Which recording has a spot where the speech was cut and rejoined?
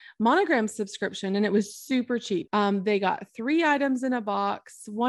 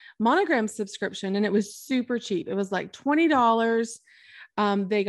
first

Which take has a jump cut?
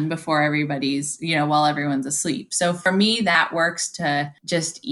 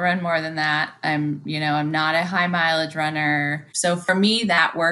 second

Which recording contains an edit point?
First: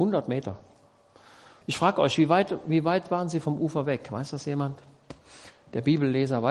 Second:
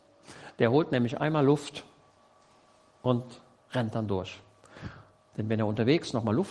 first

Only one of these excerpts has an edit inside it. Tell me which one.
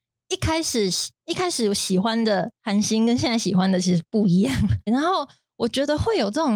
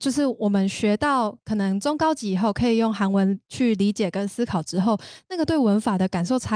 first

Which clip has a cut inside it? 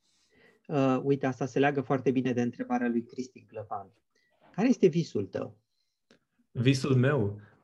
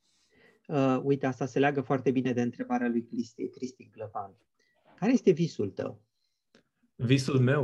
first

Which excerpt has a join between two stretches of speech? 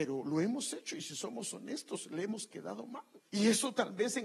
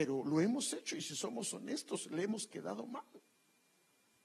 first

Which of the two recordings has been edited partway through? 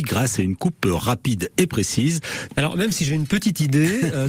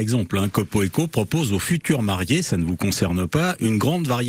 first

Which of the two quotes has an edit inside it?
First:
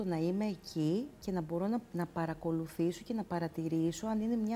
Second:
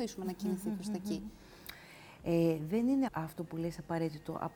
second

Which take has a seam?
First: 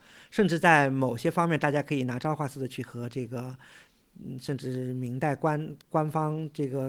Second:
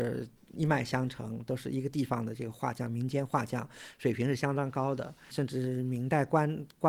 second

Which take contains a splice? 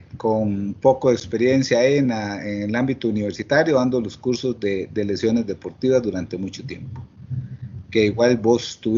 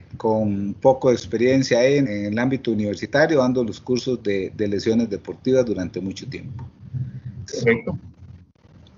second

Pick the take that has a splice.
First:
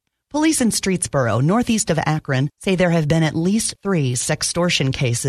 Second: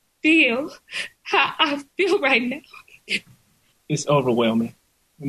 second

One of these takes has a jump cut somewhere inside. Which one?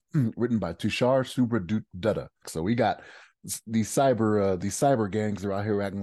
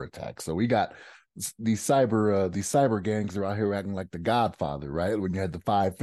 first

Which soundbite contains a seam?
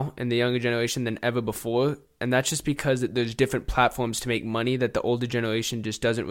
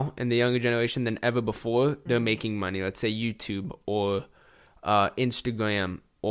second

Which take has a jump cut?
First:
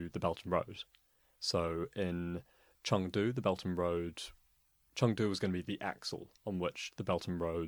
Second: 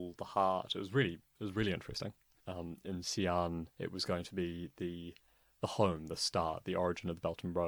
second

